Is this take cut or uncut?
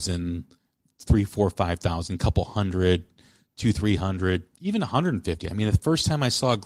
uncut